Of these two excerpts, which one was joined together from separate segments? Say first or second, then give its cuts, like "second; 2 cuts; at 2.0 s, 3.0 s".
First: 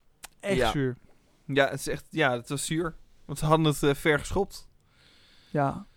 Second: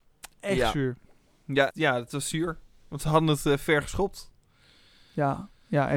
second; 1 cut; at 1.7 s